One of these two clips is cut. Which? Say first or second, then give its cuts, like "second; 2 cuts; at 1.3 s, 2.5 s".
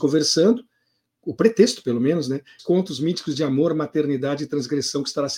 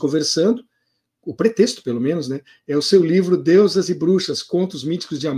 first; 1 cut; at 2.6 s